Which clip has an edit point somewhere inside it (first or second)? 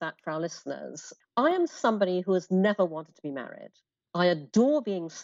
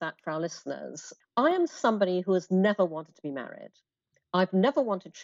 first